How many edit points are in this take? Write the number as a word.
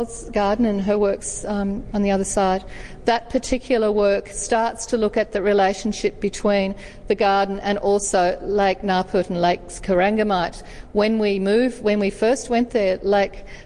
zero